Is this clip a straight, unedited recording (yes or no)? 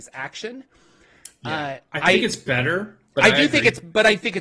yes